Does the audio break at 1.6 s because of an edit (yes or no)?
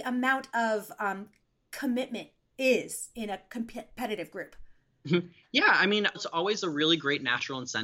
no